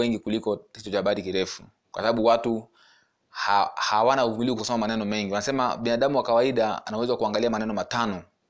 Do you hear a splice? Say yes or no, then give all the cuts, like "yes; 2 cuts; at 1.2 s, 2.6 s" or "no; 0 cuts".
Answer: yes; 1 cut; at 4.6 s